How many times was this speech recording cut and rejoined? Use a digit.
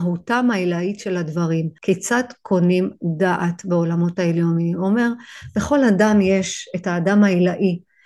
1